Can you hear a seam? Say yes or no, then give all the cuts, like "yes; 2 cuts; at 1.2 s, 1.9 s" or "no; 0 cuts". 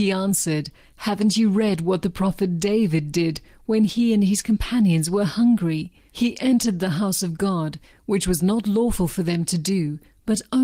yes; 1 cut; at 7.9 s